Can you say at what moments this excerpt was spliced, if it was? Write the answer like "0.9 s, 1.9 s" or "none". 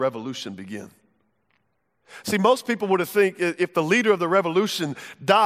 none